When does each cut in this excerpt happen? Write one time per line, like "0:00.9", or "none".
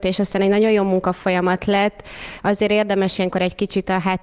none